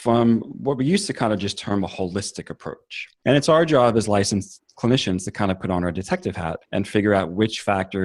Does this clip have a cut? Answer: yes; 2 cuts; at 3.2 s, 6.6 s

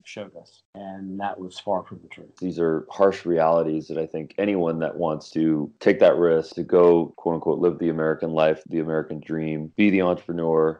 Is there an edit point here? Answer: yes; 1 cut; at 2.4 s

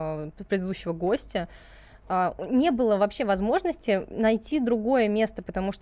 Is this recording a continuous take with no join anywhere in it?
yes; 0 cuts

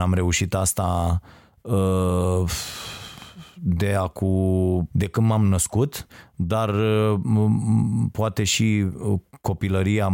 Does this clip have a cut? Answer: yes; 1 cut; at 4.9 s

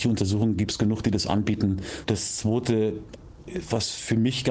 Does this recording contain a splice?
yes; 1 cut; at 2.0 s

